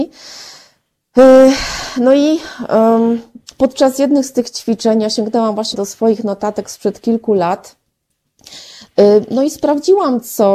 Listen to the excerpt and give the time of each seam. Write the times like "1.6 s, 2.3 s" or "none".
5.7 s